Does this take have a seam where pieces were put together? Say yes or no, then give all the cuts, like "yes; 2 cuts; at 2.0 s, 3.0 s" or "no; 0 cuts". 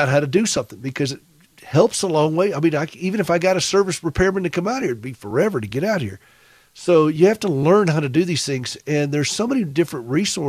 no; 0 cuts